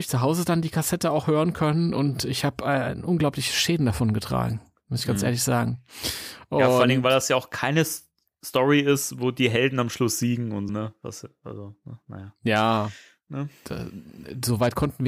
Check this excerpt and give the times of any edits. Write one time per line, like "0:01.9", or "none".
0:10.7